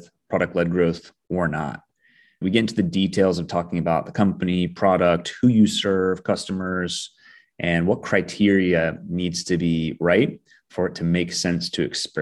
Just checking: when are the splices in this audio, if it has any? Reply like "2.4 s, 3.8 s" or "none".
none